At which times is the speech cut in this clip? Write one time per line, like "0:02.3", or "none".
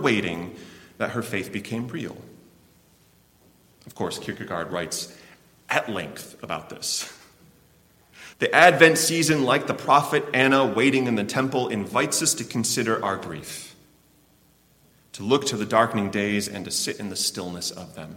0:08.3